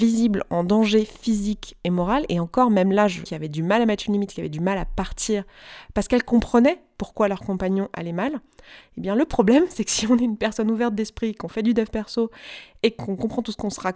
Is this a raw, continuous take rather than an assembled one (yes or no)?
no